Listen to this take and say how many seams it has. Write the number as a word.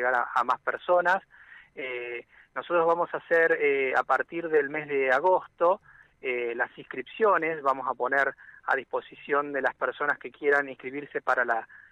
zero